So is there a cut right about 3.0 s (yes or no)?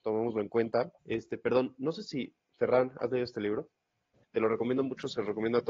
no